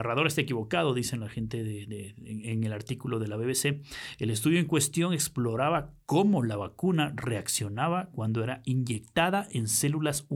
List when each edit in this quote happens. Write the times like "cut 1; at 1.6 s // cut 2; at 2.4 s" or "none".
none

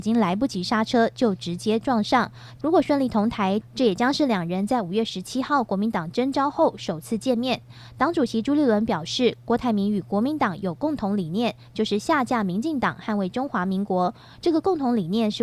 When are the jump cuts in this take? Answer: cut 1; at 2.6 s

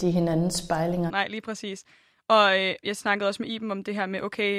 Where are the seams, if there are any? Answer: cut 1; at 1.1 s // cut 2; at 2.8 s

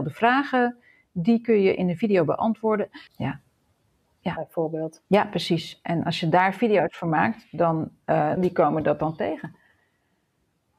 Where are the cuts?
cut 1; at 3.1 s // cut 2; at 8.4 s

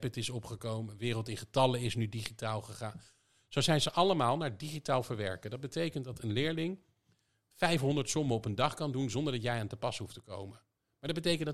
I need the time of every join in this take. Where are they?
none

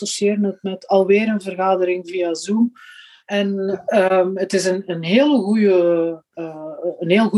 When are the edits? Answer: cut 1; at 3.2 s

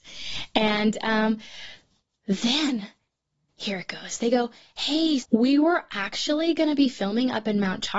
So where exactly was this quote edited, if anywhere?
cut 1; at 3.5 s // cut 2; at 5.2 s

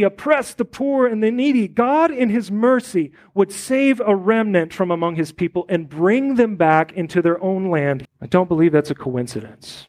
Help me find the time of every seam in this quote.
cut 1; at 8.1 s

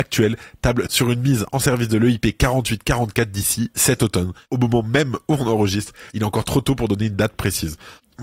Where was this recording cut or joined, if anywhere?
cut 1; at 6.1 s

